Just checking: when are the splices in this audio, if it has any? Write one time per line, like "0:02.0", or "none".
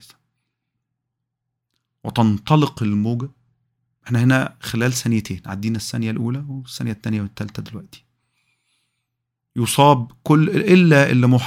none